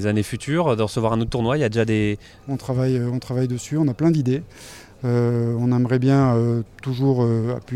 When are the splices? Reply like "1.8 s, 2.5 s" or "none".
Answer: 2.4 s